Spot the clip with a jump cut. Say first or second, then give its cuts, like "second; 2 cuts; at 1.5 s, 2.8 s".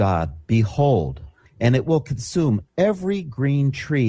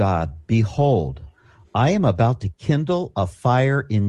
first; 1 cut; at 1.5 s